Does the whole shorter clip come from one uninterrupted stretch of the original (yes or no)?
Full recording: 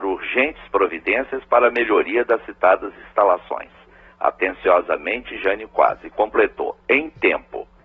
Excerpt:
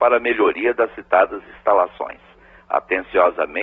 yes